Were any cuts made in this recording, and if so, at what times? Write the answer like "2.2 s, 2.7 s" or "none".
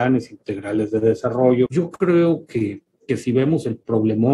1.7 s